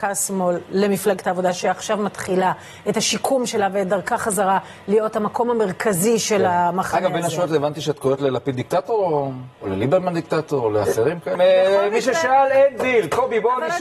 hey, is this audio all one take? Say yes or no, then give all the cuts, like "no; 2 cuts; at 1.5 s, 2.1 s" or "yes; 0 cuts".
no; 2 cuts; at 9.5 s, 11.3 s